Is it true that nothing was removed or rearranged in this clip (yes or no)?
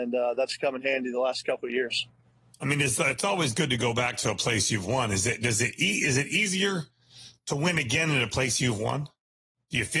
yes